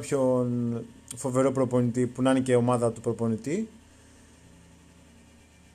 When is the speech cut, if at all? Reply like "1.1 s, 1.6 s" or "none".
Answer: none